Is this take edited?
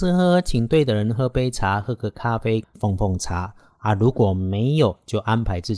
yes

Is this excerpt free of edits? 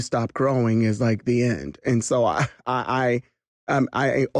yes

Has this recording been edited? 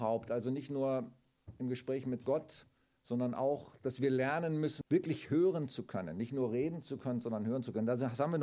yes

